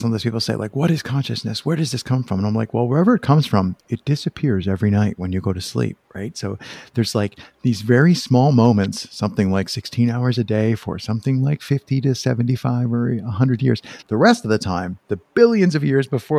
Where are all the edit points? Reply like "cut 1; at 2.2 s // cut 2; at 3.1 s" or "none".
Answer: cut 1; at 14.0 s